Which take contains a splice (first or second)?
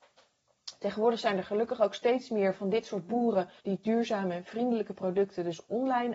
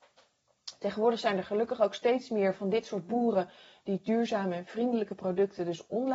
first